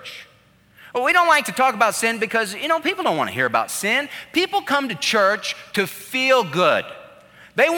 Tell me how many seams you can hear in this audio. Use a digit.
0